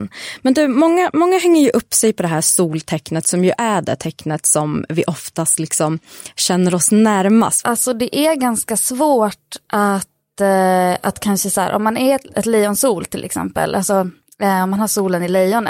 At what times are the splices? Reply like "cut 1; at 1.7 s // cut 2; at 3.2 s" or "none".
cut 1; at 7.6 s // cut 2; at 12.3 s